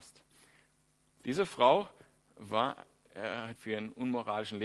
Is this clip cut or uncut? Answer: cut